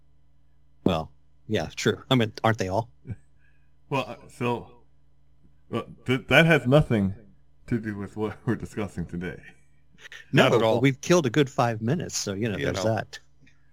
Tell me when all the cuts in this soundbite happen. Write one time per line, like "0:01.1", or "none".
none